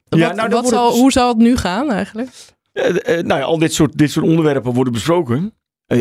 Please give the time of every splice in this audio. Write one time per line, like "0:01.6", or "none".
none